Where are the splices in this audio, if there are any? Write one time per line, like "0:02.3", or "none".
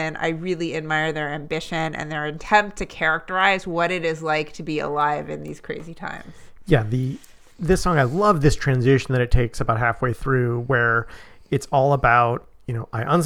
none